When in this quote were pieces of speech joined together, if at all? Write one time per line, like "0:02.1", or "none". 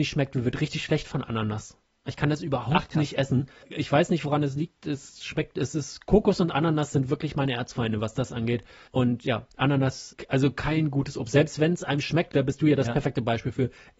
none